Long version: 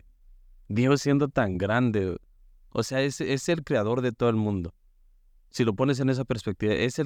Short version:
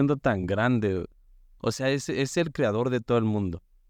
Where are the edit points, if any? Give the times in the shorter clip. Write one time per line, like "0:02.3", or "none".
none